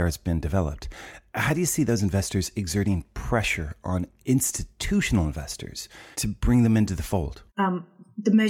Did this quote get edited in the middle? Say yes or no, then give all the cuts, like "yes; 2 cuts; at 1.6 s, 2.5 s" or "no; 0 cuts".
yes; 2 cuts; at 6.1 s, 7.5 s